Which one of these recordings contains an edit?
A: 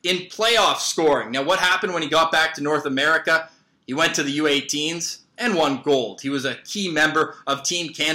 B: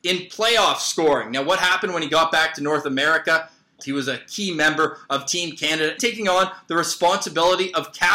B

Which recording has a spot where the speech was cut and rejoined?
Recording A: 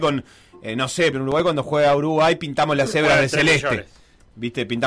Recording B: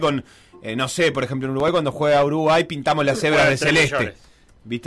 A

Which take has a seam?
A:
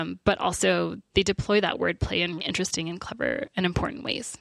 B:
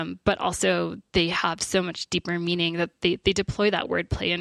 A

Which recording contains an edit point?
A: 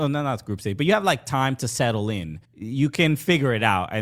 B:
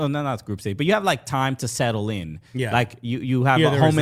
A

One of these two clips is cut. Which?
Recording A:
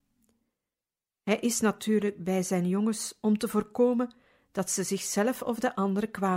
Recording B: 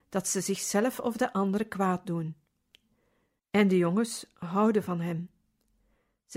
B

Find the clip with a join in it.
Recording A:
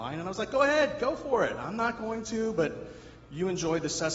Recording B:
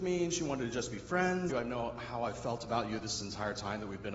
B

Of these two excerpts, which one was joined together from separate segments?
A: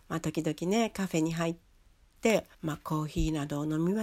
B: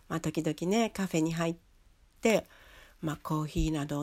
A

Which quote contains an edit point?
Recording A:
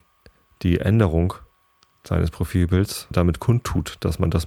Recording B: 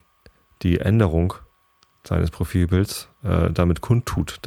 A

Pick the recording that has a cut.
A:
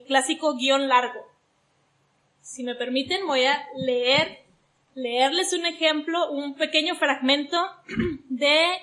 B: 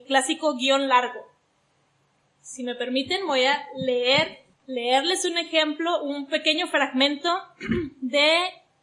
B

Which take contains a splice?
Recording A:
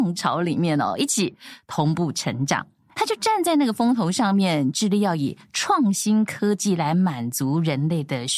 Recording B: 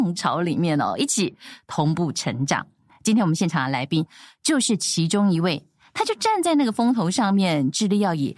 A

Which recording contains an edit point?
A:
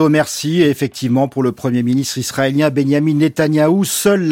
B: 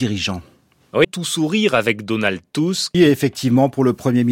B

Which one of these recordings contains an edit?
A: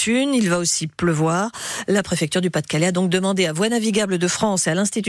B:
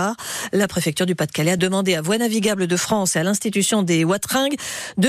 B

